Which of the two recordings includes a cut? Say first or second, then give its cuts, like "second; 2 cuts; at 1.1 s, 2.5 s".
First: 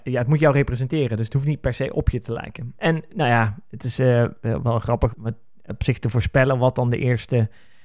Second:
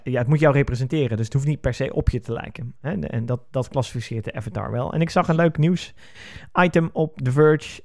first; 2 cuts; at 2.7 s, 5.1 s